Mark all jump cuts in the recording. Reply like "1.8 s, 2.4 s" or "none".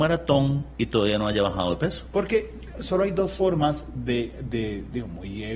2.1 s